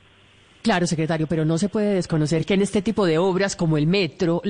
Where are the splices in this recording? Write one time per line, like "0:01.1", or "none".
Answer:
none